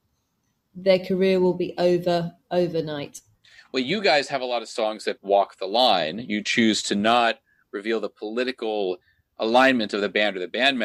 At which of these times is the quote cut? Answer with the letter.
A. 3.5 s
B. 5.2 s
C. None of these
B